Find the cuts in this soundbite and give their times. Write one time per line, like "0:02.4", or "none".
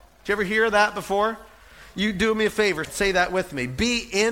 0:02.8